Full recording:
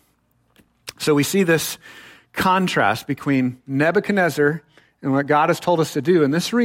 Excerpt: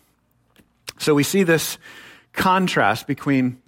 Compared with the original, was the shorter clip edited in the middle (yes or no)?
no